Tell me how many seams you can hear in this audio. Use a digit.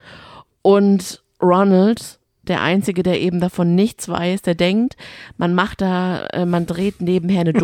0